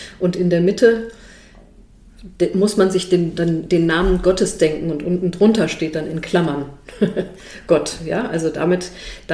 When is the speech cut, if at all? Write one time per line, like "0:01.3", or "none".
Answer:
none